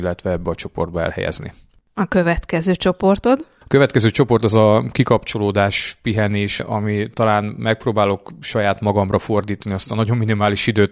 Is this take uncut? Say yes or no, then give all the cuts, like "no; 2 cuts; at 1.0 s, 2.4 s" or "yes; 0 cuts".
no; 1 cut; at 6.6 s